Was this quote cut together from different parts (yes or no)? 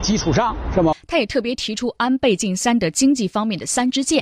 yes